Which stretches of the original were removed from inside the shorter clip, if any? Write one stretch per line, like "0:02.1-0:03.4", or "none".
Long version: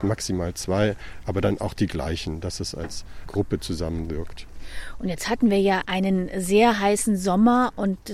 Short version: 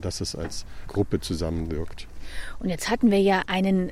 none